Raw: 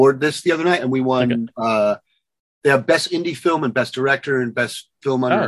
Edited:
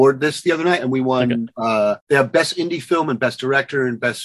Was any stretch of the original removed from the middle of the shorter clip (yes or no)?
yes